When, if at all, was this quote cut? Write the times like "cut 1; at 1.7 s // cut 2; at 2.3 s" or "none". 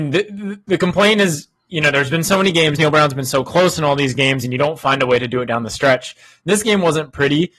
none